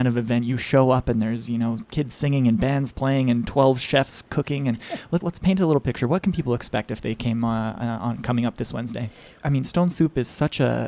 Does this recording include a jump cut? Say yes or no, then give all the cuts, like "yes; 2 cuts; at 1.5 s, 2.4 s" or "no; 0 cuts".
yes; 2 cuts; at 5.2 s, 9.4 s